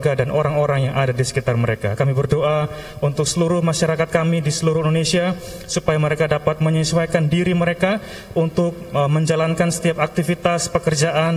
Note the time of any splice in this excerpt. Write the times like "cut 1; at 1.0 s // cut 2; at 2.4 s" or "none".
cut 1; at 2.0 s